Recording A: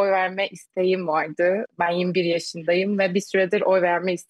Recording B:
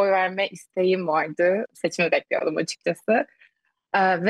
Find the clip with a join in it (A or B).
B